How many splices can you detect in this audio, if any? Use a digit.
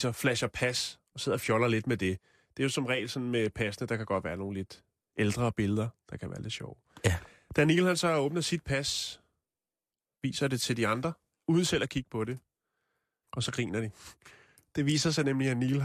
1